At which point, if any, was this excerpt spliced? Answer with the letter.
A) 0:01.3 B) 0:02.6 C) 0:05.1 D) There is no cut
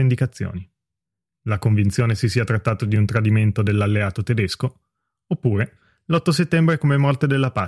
A